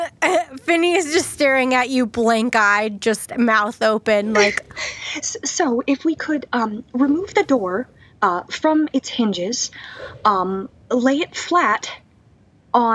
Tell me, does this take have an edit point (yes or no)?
no